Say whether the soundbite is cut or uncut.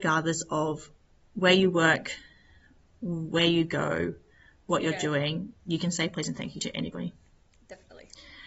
uncut